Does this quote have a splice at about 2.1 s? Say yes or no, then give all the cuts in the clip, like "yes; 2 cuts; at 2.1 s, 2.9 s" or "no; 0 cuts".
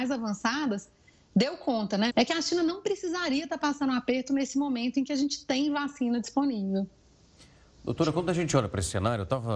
yes; 1 cut; at 2.1 s